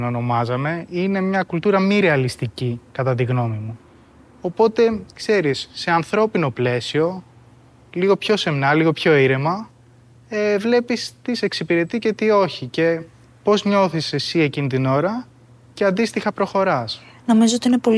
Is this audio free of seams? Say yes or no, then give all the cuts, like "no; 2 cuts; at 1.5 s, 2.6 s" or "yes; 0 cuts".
yes; 0 cuts